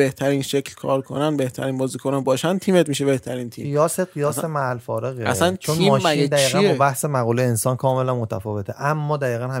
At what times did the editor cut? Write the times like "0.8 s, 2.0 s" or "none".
none